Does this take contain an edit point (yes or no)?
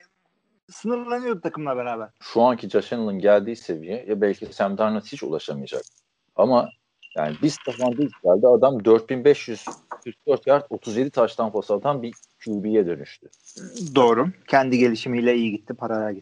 yes